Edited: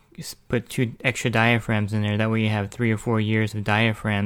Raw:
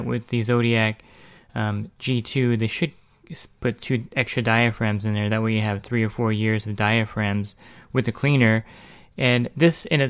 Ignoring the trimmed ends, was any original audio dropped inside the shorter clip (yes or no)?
no